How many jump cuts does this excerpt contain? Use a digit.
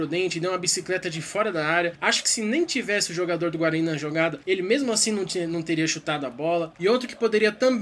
1